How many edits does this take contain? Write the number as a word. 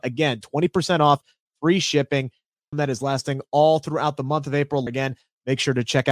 two